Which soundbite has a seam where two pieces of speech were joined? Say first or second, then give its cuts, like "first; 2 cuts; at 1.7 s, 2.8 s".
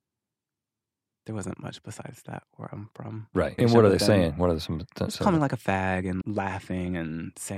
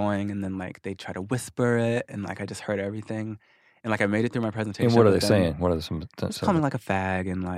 first; 2 cuts; at 3.6 s, 6.2 s